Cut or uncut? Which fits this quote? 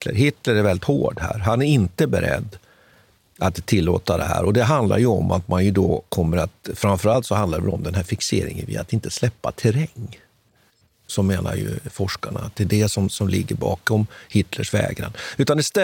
uncut